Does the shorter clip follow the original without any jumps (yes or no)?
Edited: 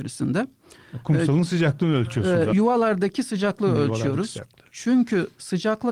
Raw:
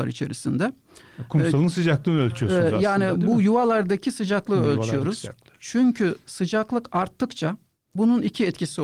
no